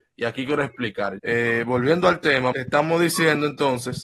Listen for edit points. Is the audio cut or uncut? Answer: cut